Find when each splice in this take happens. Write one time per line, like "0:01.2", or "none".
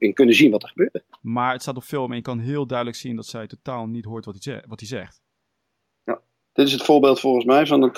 0:01.2
0:06.4